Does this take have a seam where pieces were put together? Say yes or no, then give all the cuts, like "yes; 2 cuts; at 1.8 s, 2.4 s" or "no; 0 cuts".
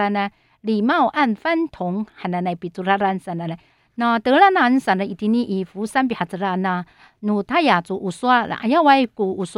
yes; 1 cut; at 3.8 s